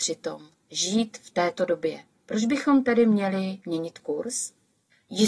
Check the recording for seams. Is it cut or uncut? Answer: cut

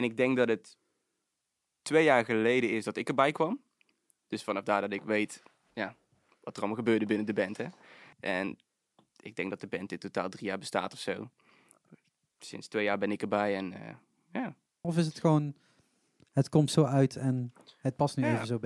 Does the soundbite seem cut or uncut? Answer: cut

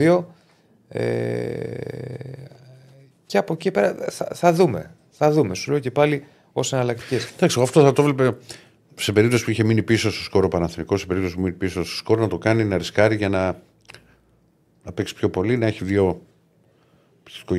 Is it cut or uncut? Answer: uncut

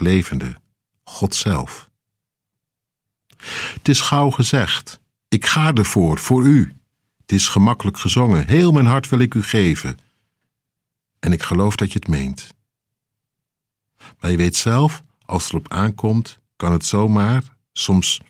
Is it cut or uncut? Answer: cut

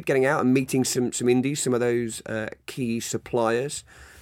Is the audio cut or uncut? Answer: uncut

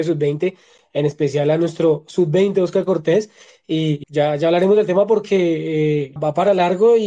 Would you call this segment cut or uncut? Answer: cut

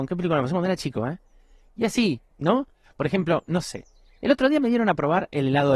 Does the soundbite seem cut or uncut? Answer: cut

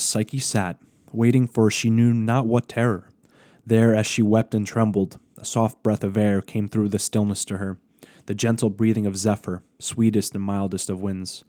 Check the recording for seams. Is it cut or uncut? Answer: uncut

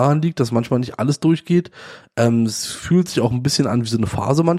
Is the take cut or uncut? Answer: uncut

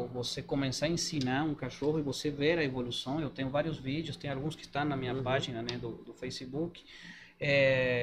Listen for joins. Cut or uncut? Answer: uncut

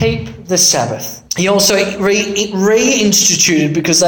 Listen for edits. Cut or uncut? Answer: cut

